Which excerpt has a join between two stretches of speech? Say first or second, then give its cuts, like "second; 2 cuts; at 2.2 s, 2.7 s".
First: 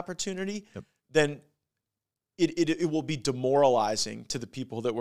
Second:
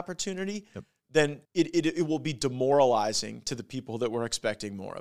second; 1 cut; at 1.4 s